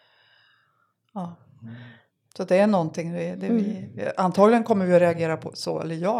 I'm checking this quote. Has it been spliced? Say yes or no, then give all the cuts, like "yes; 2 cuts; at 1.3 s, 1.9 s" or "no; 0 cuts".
no; 0 cuts